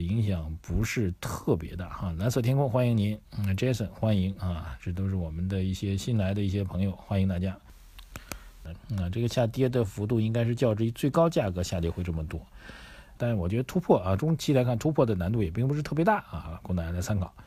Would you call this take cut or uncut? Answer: cut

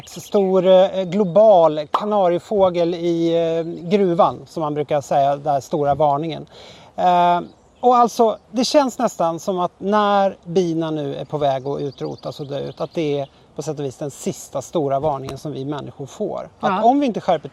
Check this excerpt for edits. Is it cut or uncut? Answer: cut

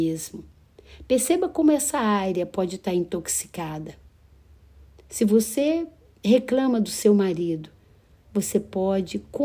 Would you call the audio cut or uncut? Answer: cut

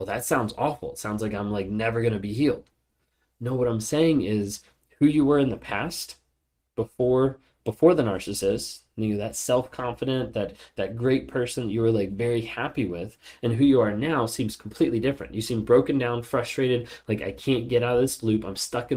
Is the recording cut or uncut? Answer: uncut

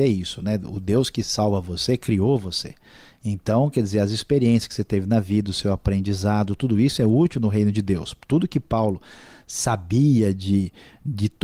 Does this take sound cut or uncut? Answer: uncut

